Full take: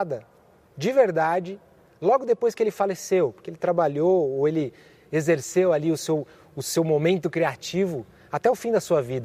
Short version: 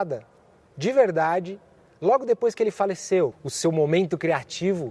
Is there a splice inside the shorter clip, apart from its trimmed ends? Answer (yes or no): yes